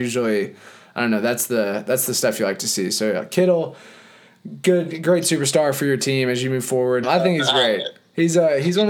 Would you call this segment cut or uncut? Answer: cut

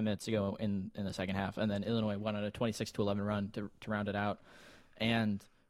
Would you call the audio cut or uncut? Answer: uncut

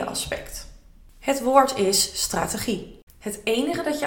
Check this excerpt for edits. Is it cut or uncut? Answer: cut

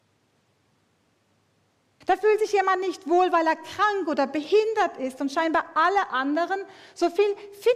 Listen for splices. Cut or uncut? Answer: cut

